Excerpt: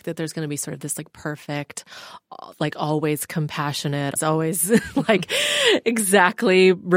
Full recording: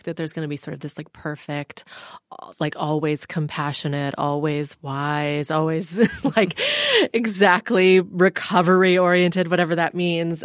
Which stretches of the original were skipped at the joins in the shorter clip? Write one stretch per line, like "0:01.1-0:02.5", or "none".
0:04.2-0:05.4